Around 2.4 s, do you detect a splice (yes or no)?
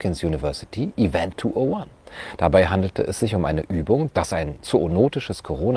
no